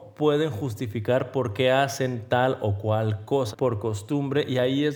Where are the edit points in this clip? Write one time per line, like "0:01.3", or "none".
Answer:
0:03.5